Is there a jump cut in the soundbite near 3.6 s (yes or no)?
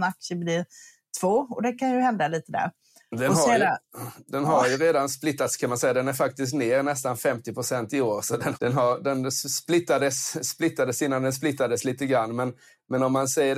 no